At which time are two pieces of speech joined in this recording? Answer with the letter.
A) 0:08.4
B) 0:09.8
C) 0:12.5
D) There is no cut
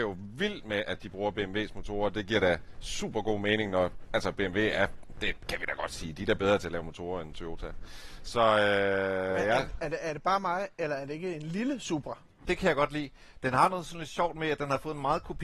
C